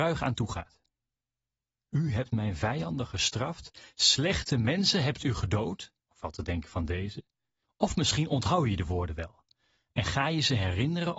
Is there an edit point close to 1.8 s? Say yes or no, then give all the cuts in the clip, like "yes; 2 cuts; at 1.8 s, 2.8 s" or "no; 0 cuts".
no; 2 cuts; at 6.0 s, 7.6 s